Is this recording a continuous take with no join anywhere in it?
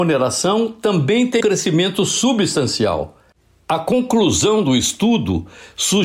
no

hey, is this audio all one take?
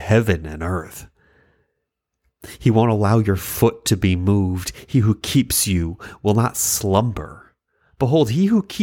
yes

